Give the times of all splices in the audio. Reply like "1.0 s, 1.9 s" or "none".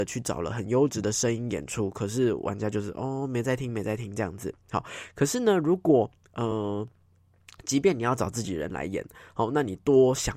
none